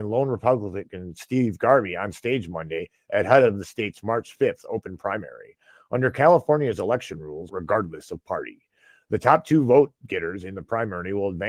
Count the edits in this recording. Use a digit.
1